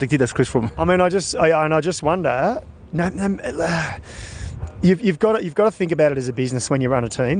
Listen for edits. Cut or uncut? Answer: uncut